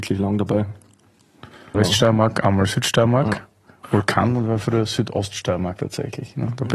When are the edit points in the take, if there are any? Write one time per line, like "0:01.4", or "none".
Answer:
0:01.7

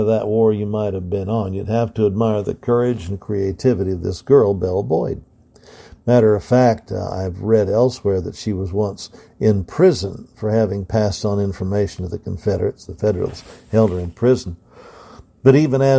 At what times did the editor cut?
none

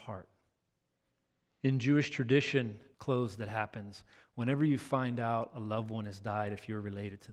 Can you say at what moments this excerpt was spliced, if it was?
0:01.6
0:02.9

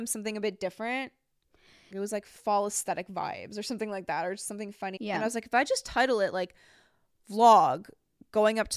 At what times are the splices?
0:01.9
0:05.0

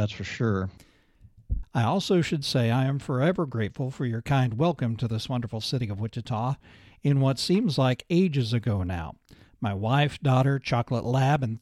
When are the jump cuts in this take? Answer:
0:01.6

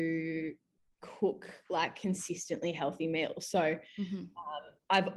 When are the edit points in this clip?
none

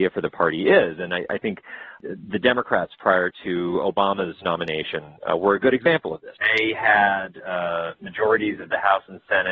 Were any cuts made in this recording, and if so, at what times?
0:06.4

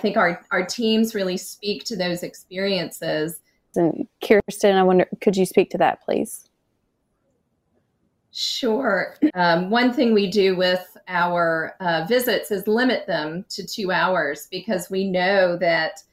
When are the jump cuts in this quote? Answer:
0:03.7
0:09.3

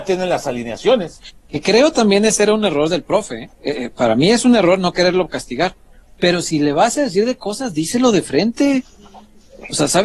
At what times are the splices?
0:03.5

